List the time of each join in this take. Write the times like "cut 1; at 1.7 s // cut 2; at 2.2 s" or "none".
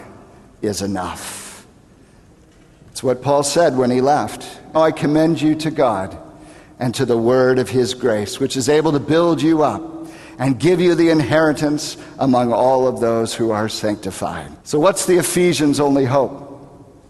cut 1; at 4.8 s // cut 2; at 14.6 s